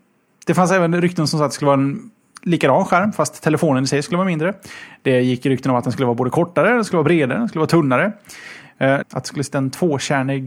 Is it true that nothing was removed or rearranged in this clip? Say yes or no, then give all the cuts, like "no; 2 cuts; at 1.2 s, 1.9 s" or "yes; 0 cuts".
no; 1 cut; at 9.0 s